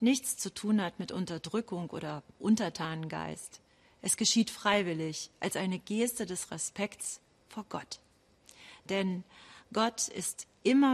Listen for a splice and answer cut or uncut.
uncut